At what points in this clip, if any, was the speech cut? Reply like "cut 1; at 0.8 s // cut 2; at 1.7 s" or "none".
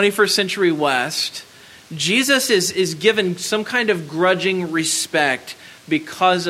none